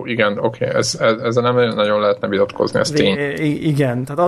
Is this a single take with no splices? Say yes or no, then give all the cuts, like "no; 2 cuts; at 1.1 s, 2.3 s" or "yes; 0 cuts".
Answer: yes; 0 cuts